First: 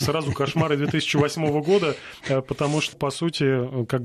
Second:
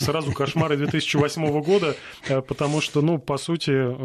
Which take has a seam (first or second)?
first